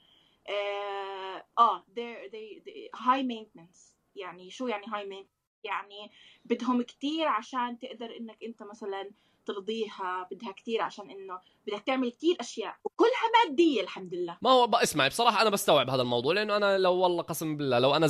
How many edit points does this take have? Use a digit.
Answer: 2